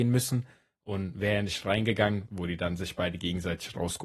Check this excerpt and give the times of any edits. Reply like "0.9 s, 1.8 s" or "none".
2.3 s